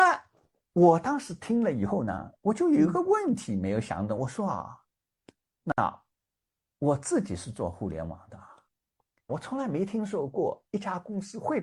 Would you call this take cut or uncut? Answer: cut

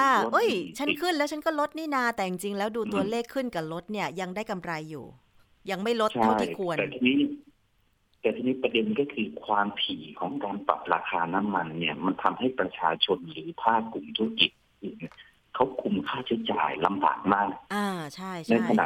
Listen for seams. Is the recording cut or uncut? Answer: uncut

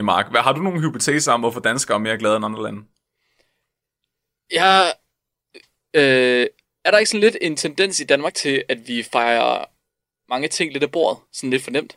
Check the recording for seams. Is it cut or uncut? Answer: uncut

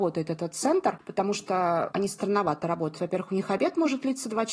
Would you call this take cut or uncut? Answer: cut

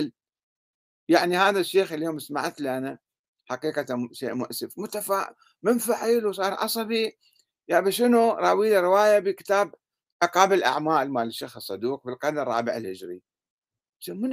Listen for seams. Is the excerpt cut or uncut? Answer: uncut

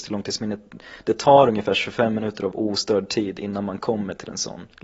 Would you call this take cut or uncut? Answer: uncut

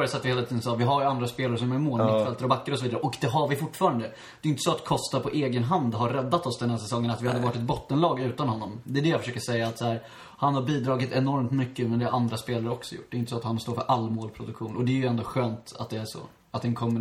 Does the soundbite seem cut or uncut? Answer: uncut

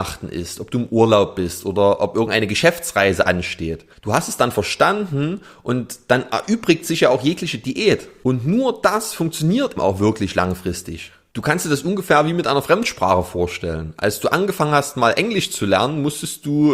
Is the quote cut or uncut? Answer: cut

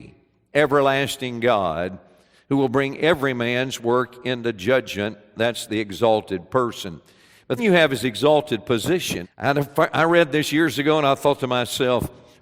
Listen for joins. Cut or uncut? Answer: cut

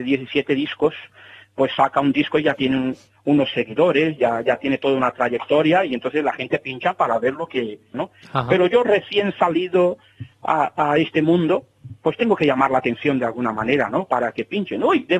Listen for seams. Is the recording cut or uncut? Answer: cut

